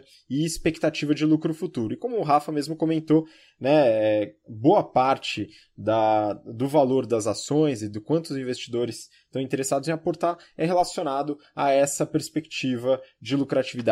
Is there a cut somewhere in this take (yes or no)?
no